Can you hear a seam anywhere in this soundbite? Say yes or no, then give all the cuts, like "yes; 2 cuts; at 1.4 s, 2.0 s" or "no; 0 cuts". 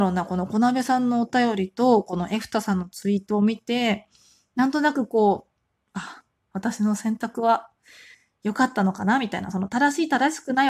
no; 0 cuts